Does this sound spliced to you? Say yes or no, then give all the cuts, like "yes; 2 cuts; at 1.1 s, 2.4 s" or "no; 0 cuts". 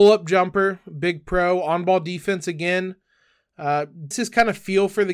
yes; 1 cut; at 4.1 s